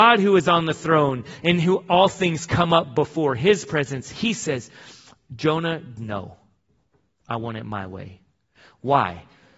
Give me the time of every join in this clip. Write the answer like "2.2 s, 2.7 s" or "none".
6.0 s